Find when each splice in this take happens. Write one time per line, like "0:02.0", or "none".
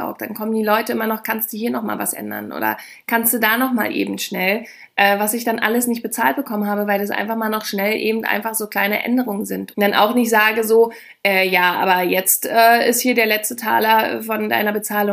0:09.7